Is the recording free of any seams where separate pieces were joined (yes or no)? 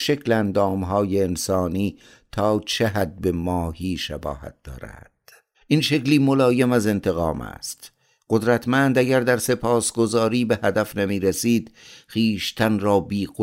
no